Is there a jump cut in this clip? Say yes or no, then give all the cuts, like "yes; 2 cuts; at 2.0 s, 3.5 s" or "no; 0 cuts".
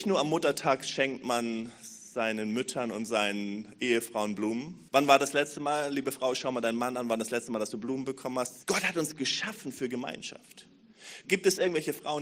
yes; 3 cuts; at 4.9 s, 8.6 s, 11.2 s